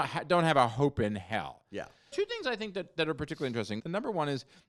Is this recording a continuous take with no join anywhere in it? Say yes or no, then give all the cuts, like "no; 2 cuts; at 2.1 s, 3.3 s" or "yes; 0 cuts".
no; 2 cuts; at 2.1 s, 3.8 s